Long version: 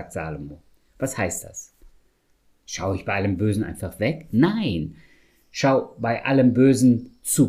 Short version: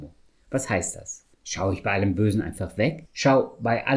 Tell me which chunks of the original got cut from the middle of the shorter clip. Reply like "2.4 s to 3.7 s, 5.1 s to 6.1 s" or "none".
1.8 s to 2.6 s, 4.3 s to 5.4 s